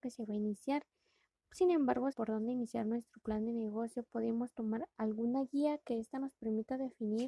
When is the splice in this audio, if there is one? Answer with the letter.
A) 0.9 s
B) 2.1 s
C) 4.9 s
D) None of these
B